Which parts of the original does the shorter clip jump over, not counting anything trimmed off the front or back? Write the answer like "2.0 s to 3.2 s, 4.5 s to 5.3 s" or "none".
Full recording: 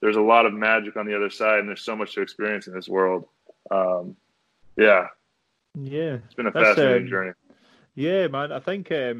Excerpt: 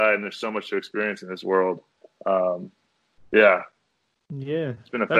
none